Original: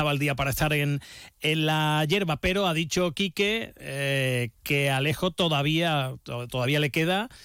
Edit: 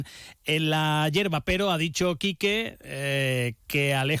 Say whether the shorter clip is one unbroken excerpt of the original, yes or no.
yes